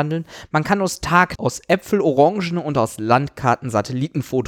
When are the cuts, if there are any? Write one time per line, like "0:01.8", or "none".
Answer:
0:01.4